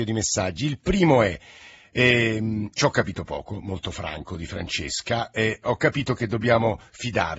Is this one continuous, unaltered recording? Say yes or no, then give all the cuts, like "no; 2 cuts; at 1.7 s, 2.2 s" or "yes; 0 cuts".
yes; 0 cuts